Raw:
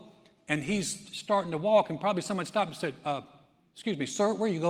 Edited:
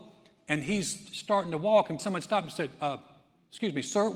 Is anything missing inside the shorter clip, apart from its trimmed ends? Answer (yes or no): yes